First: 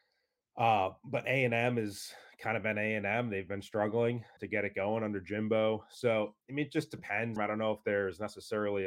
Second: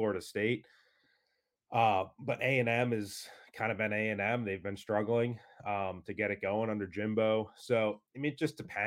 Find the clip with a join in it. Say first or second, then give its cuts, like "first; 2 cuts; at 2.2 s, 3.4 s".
first; 2 cuts; at 4.4 s, 7.4 s